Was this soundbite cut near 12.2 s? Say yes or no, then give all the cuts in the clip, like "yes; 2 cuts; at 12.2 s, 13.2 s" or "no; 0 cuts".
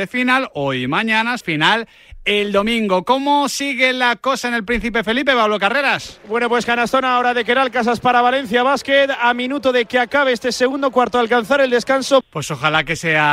yes; 2 cuts; at 1.4 s, 12.2 s